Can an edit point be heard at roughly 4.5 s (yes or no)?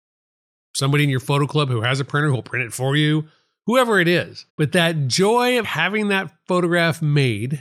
yes